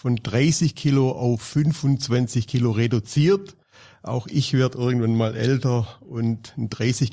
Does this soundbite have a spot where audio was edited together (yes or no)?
no